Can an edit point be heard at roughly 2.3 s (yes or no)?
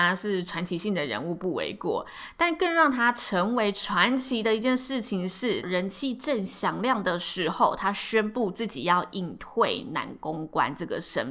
no